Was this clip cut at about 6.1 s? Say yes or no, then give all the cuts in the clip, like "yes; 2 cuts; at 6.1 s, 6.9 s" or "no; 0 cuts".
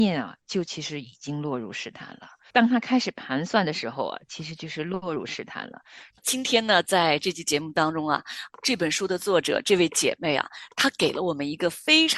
yes; 2 cuts; at 2.5 s, 6.1 s